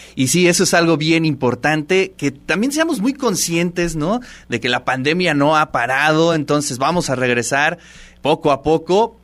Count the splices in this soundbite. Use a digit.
0